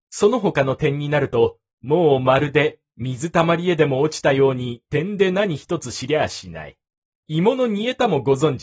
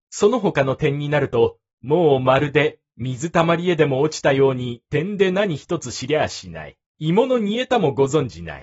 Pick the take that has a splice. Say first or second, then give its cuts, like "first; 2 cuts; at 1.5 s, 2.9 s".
second; 1 cut; at 6.9 s